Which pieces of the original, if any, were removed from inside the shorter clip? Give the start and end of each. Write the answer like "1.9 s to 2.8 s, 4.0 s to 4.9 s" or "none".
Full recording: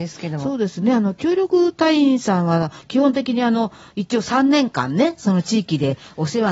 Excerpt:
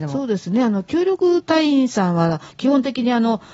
none